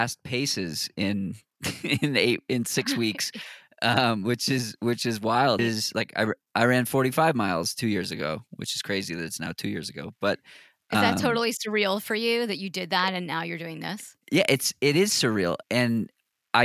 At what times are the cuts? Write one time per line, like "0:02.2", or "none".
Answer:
0:05.6
0:14.2
0:15.6